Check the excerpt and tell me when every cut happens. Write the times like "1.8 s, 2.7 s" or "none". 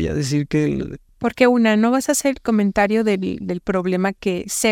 1.1 s